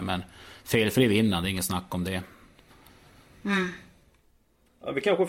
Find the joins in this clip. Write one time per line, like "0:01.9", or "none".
none